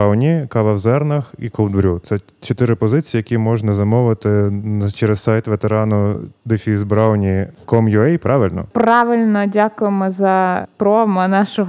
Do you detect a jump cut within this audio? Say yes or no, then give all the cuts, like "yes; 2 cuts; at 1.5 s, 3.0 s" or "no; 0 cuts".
no; 0 cuts